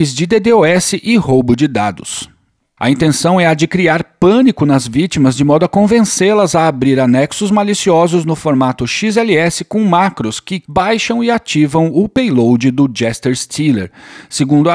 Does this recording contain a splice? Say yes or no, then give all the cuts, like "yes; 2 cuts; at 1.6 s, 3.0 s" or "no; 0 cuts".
yes; 2 cuts; at 2.8 s, 10.7 s